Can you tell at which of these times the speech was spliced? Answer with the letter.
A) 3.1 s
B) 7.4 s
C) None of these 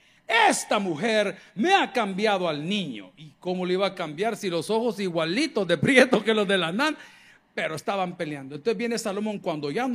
C